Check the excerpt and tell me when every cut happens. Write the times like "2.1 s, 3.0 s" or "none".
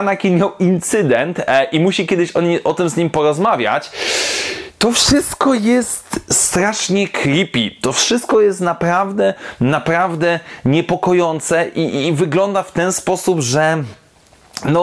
none